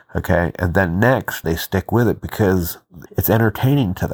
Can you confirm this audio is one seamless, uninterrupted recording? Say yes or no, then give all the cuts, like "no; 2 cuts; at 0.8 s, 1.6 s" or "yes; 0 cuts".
no; 2 cuts; at 1.4 s, 3.1 s